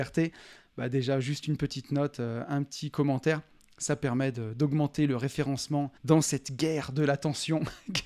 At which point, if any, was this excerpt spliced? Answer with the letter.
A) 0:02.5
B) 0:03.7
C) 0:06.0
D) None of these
C